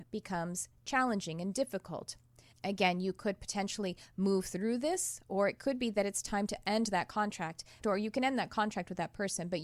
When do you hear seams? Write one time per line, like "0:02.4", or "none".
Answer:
0:02.5
0:07.8